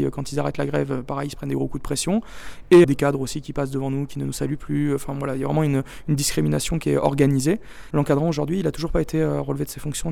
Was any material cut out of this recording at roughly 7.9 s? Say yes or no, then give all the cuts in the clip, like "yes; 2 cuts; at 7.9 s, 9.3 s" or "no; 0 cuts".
yes; 2 cuts; at 2.8 s, 7.9 s